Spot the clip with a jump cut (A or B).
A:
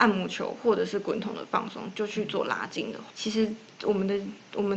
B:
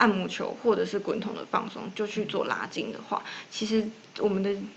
A